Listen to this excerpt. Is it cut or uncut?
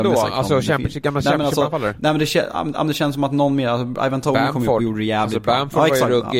uncut